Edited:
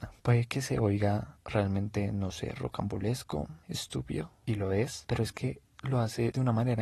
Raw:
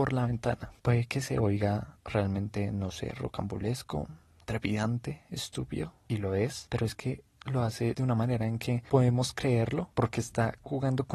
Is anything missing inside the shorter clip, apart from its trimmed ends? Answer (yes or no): yes